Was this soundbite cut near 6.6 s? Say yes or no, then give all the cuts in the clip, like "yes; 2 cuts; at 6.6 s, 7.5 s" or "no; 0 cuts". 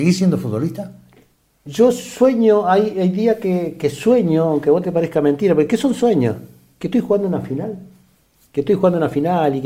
no; 0 cuts